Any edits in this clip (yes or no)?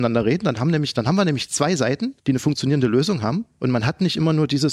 yes